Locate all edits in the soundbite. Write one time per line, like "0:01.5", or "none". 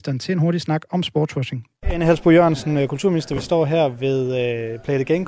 0:01.7